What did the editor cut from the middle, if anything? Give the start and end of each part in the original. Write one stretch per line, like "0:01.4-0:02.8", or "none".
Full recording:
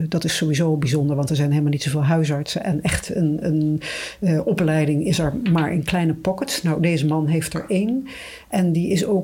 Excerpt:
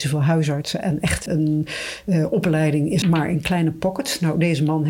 0:03.1-0:03.4
0:05.2-0:05.4